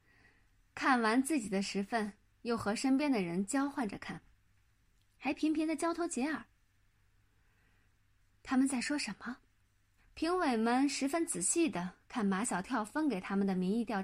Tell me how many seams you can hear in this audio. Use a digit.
1